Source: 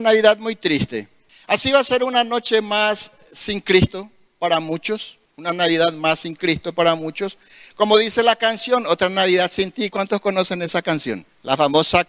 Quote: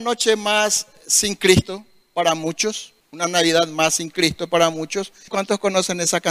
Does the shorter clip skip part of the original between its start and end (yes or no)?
yes